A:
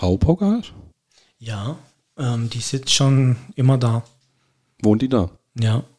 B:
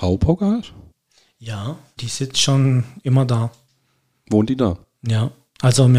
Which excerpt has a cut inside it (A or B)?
B